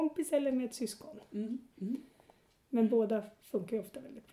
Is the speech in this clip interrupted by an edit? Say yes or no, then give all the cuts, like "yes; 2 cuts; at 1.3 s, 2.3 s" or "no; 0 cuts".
no; 0 cuts